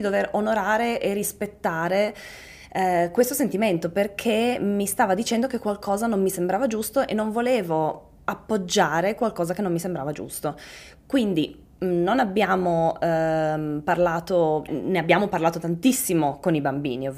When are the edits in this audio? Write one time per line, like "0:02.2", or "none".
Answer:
0:14.7

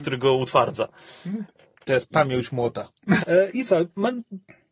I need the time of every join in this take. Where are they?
0:03.2

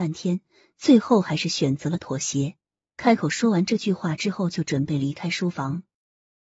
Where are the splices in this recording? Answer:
none

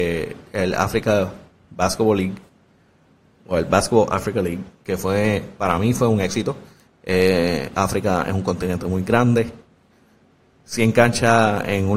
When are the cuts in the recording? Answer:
0:04.8
0:06.9

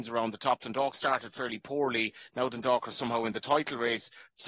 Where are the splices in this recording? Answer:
none

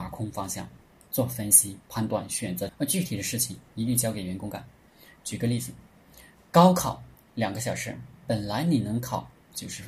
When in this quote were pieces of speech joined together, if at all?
0:02.7

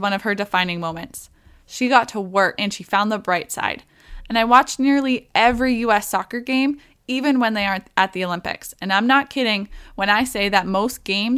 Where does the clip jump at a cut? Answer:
0:02.6

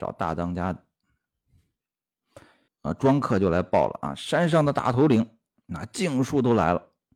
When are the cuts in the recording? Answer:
0:02.7

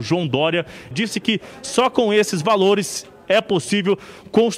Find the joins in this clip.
0:00.9

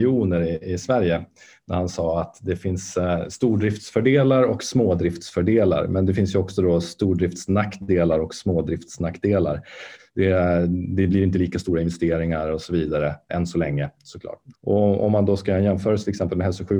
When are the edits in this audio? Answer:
0:10.0
0:13.3
0:14.5

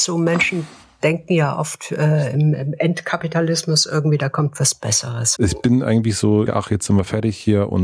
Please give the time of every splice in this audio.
0:05.4
0:06.5

